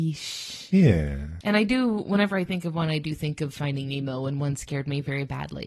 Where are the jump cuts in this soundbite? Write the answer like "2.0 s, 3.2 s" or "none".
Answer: 1.4 s

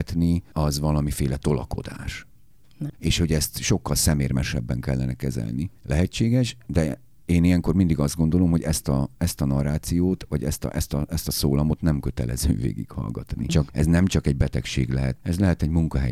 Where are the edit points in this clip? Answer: 2.9 s, 13.5 s, 15.2 s

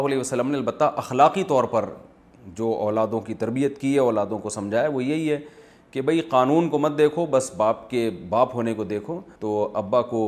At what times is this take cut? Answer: 9.4 s

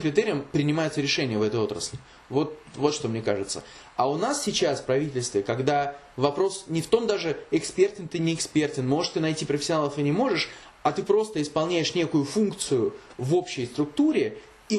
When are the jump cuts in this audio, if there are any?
none

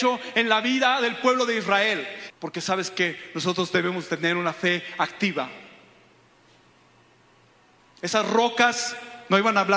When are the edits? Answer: 2.3 s

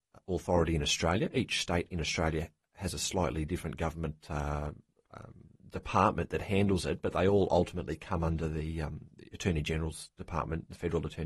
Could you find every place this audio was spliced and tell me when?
none

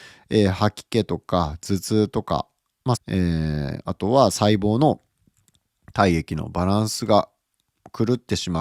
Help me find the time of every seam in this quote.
3.0 s

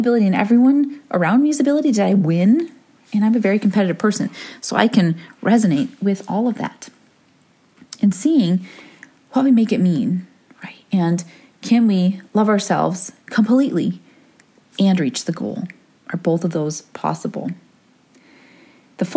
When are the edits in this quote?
none

